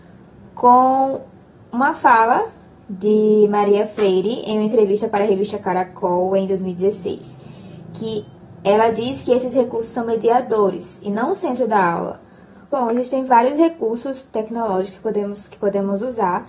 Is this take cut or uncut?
cut